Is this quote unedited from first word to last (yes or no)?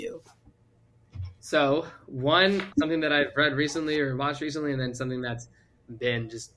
no